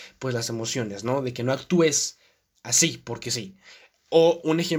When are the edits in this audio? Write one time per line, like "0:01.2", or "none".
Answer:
none